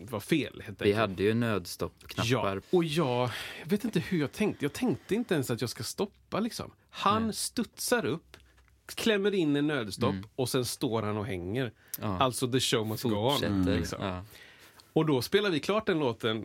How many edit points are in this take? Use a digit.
1